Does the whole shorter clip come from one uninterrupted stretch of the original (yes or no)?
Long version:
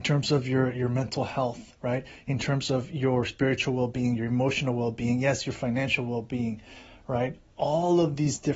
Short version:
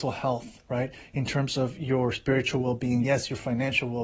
no